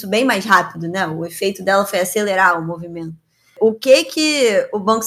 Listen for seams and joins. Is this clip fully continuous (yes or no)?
yes